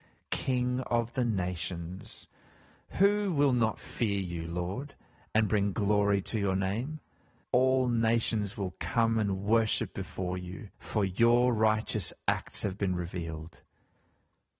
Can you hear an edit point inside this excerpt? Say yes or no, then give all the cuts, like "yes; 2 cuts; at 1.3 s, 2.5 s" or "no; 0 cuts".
yes; 2 cuts; at 7.4 s, 10.7 s